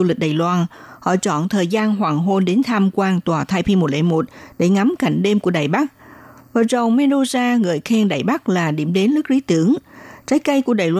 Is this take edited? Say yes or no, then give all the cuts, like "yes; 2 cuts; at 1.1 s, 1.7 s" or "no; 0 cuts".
no; 0 cuts